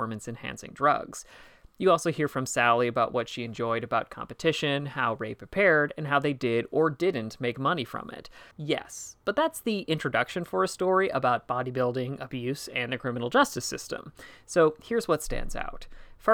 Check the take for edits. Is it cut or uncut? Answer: cut